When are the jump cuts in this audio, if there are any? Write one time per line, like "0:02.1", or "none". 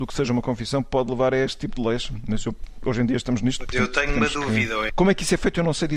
0:04.9